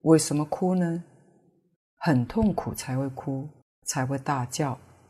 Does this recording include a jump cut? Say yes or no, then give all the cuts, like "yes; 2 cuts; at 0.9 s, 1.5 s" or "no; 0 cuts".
no; 0 cuts